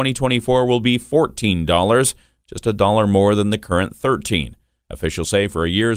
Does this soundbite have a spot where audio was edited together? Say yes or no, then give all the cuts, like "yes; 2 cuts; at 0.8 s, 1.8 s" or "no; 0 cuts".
no; 0 cuts